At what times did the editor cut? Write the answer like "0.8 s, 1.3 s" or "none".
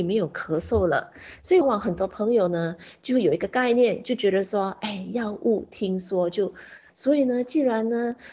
1.6 s, 6.9 s